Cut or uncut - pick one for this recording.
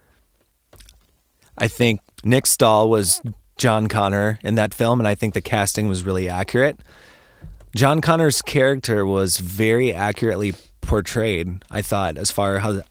cut